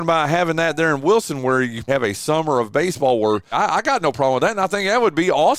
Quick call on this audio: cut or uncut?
cut